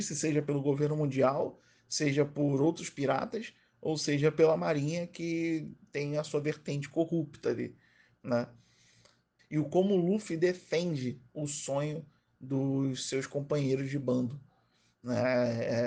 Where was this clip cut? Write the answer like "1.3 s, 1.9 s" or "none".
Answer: 9.4 s

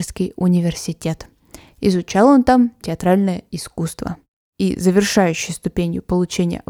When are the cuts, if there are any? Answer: 2.8 s

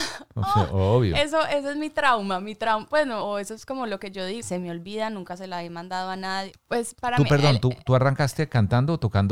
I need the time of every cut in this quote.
3.2 s, 4.4 s, 6.5 s

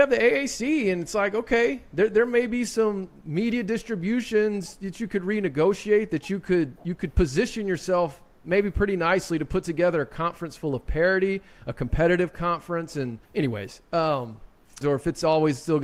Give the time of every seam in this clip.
13.2 s, 14.8 s

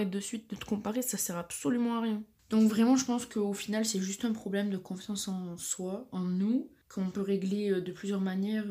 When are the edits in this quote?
none

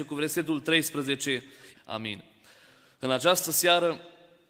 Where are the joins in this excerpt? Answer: 1.7 s

